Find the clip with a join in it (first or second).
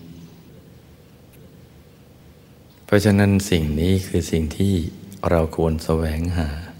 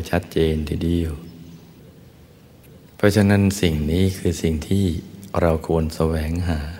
second